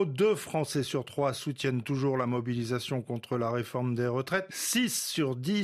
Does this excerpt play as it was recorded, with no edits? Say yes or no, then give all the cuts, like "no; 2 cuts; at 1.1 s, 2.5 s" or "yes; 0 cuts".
no; 1 cut; at 4.5 s